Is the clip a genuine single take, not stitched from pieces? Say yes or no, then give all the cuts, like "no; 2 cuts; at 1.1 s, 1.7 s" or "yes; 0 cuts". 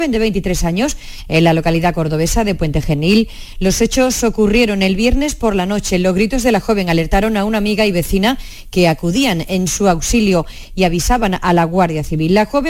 yes; 0 cuts